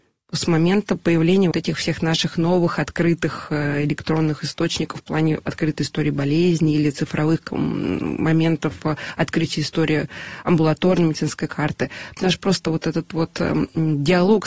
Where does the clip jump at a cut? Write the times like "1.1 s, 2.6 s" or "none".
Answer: 1.5 s, 12.2 s